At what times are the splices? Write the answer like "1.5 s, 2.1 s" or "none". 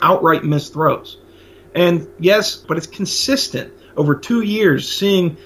2.6 s